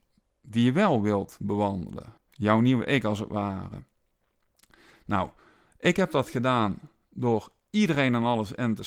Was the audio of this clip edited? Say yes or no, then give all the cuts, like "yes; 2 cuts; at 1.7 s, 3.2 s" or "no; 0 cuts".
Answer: yes; 1 cut; at 2.2 s